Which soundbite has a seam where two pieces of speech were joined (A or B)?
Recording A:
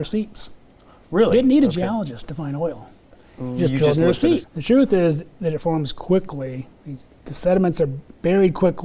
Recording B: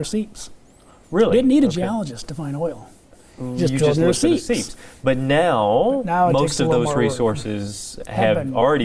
A